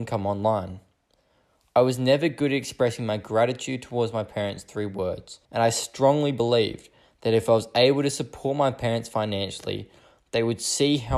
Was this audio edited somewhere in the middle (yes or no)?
yes